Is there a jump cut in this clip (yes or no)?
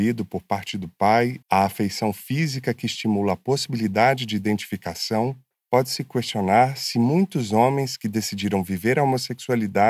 yes